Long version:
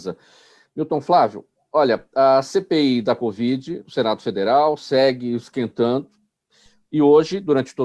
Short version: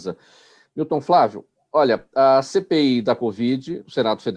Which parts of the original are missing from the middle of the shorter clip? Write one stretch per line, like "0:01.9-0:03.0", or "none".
none